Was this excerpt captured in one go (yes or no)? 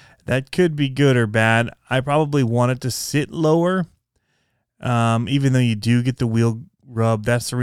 yes